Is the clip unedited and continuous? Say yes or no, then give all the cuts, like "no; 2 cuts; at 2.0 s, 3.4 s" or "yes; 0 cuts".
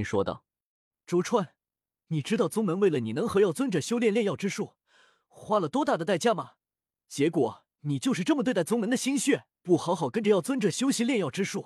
no; 1 cut; at 9.6 s